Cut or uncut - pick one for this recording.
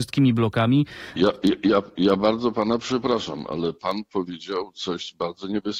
cut